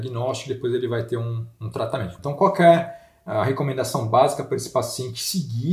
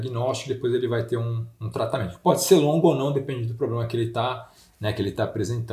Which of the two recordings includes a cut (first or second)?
first